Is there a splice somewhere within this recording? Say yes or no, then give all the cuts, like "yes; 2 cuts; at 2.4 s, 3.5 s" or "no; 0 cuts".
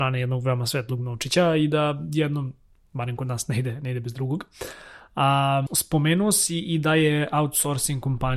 yes; 1 cut; at 5.7 s